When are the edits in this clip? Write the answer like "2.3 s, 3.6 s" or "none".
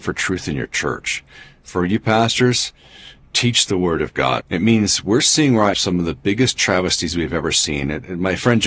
4.4 s, 5.7 s